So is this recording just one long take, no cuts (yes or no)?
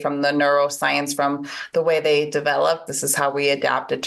no